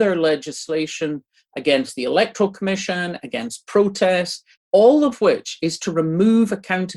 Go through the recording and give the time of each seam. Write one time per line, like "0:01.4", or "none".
0:04.5
0:05.8

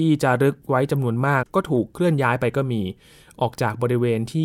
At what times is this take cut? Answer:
0:01.4

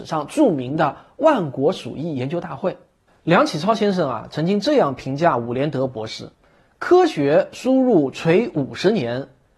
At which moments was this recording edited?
0:03.1
0:06.3

